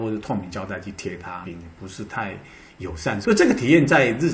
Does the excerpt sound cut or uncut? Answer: cut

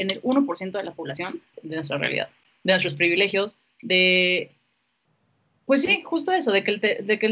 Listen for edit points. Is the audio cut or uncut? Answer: cut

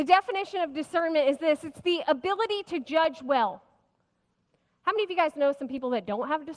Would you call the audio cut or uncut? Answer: uncut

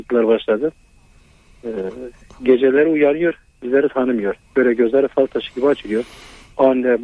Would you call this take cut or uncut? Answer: uncut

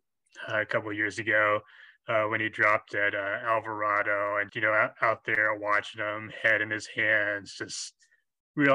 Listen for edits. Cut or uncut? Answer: cut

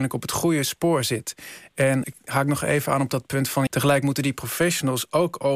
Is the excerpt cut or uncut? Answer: cut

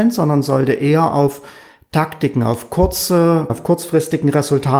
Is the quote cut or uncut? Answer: cut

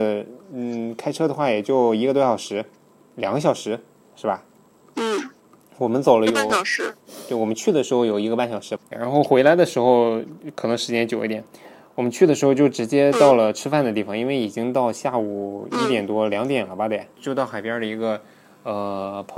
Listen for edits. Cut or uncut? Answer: uncut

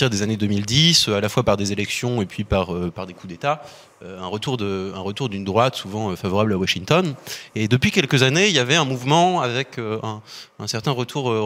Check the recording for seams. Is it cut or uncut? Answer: uncut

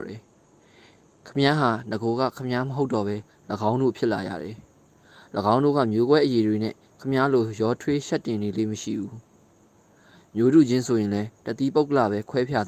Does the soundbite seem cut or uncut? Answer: uncut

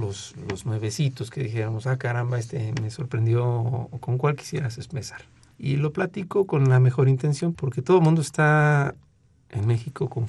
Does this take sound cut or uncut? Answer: cut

